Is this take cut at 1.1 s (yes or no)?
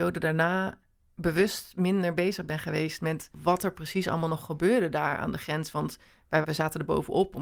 no